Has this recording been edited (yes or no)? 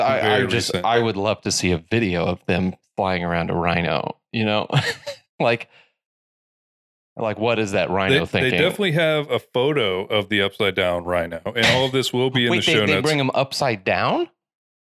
no